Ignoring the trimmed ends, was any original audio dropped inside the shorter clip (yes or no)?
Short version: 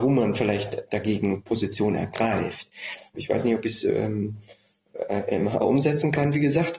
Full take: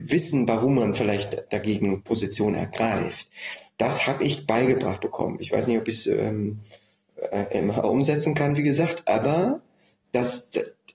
yes